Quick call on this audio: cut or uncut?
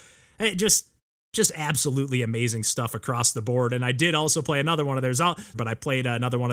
cut